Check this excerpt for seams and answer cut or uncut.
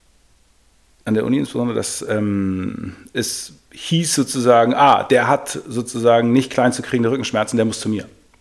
uncut